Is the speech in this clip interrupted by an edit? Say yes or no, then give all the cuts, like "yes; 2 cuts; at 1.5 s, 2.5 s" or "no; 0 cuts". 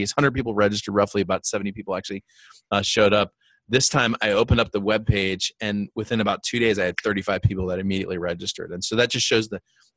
no; 0 cuts